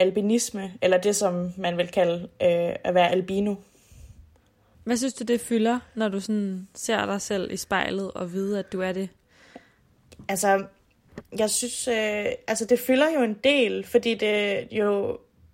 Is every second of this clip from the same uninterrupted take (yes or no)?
yes